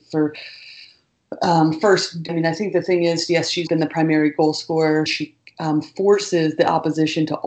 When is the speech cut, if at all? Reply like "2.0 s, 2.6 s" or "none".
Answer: 2.3 s, 3.7 s, 5.1 s